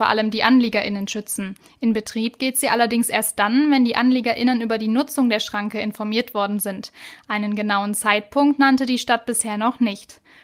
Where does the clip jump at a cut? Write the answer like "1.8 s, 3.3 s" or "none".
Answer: none